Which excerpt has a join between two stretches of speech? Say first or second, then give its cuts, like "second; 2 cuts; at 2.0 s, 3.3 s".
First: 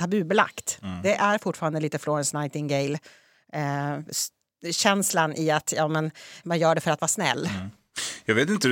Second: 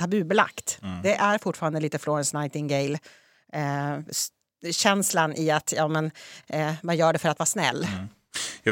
first; 1 cut; at 6.4 s